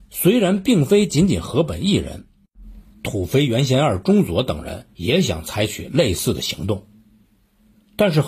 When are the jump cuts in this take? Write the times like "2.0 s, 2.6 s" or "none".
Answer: 2.9 s, 4.9 s